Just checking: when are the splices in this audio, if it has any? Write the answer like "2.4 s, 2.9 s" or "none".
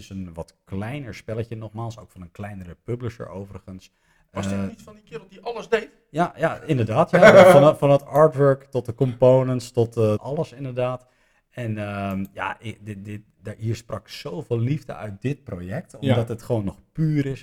10.2 s, 13.0 s